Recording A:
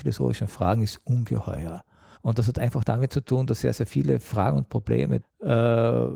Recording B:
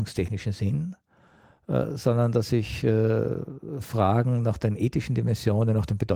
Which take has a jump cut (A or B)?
A